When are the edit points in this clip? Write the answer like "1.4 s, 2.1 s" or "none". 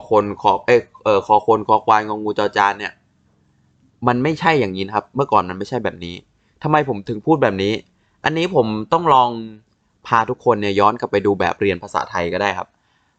none